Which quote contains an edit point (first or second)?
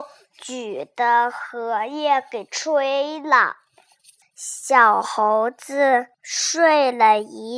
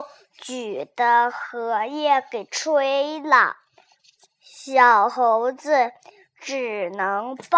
first